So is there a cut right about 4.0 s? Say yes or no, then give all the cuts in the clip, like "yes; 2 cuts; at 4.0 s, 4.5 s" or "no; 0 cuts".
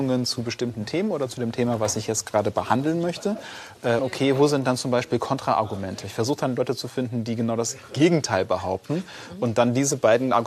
yes; 1 cut; at 4.0 s